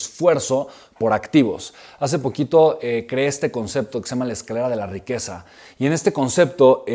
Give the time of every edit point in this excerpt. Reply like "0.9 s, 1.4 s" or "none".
none